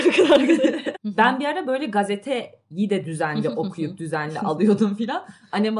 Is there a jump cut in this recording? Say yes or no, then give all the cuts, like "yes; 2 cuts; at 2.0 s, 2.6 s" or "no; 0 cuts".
yes; 1 cut; at 0.9 s